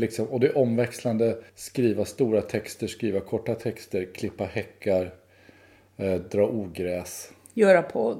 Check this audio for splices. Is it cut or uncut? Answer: cut